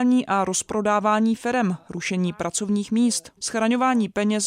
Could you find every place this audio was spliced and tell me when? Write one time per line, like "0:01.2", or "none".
0:03.4